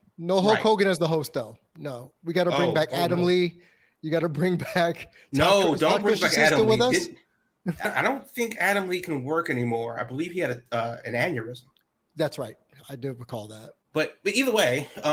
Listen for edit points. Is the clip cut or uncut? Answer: cut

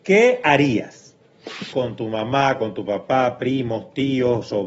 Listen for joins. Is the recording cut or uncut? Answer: cut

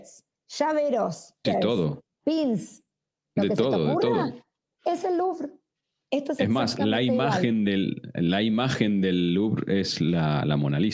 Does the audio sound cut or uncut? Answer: cut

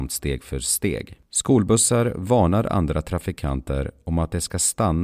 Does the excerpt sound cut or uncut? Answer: cut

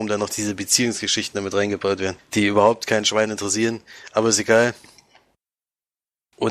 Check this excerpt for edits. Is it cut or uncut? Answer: uncut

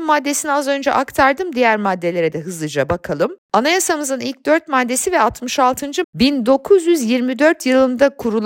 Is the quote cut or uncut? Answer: cut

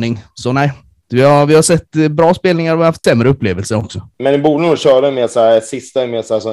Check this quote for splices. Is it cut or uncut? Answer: cut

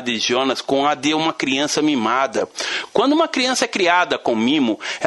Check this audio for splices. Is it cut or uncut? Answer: uncut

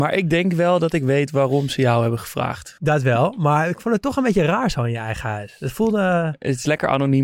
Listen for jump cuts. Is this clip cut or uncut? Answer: cut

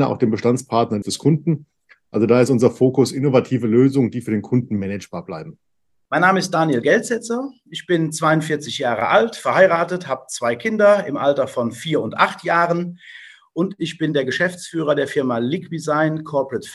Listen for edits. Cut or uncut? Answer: cut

